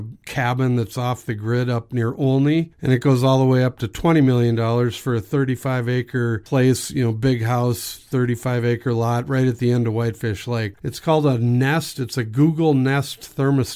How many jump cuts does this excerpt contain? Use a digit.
1